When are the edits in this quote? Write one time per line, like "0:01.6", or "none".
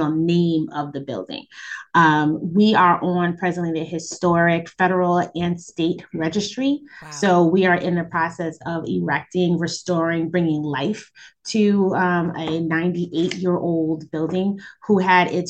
none